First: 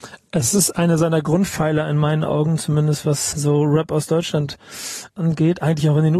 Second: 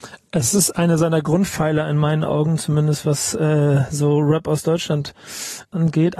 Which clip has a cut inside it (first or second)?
first